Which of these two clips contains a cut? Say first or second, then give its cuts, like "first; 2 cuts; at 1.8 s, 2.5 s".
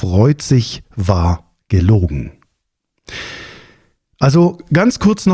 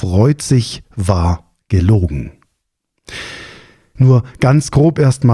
second; 1 cut; at 4.0 s